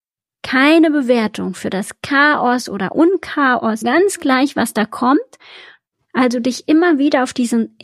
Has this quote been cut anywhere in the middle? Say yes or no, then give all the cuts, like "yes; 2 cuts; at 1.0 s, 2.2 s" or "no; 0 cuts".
yes; 2 cuts; at 3.8 s, 5.9 s